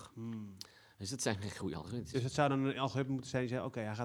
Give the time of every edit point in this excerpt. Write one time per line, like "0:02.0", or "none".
none